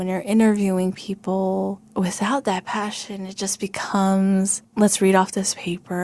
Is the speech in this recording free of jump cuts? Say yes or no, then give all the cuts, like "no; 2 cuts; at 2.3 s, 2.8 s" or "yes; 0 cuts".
no; 1 cut; at 1.8 s